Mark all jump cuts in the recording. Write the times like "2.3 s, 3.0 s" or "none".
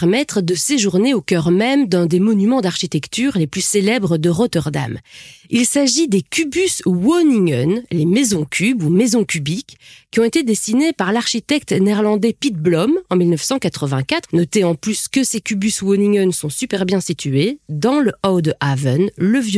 14.2 s